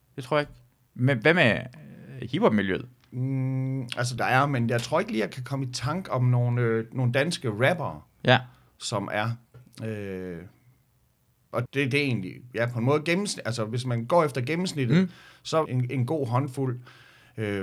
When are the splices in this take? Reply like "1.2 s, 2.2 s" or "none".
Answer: 4.2 s, 11.7 s, 15.7 s